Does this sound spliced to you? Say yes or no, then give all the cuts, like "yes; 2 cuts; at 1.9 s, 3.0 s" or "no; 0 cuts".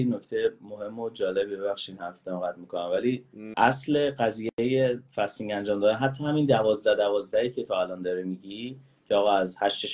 yes; 1 cut; at 3.5 s